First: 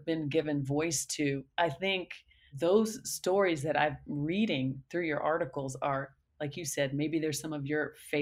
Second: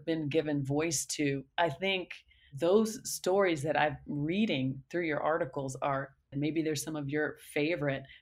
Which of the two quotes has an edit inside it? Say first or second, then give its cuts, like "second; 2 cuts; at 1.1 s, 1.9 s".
second; 1 cut; at 6.3 s